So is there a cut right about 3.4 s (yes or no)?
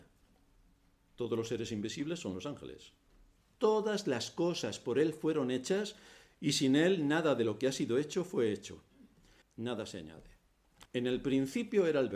yes